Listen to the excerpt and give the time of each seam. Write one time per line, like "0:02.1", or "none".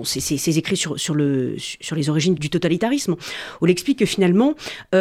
0:02.4